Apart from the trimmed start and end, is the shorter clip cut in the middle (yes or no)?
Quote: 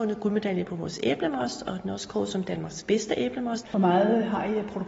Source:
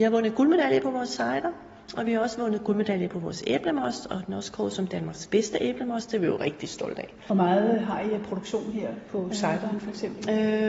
yes